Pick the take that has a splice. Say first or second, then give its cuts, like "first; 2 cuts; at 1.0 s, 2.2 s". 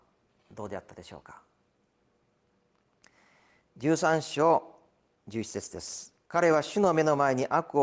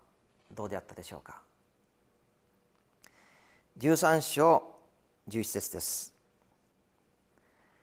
first; 1 cut; at 6.2 s